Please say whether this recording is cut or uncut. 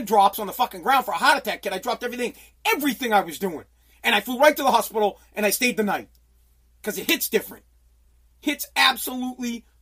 uncut